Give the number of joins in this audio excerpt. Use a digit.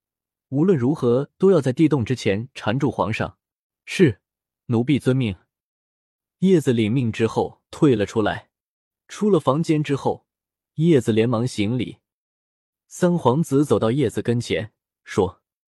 3